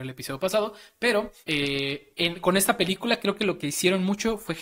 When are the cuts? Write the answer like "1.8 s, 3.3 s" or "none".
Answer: 1.4 s